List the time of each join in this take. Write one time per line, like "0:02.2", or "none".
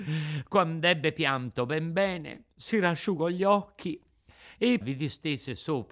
0:04.8